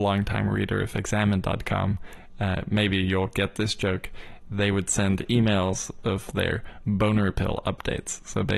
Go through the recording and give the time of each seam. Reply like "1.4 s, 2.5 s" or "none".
none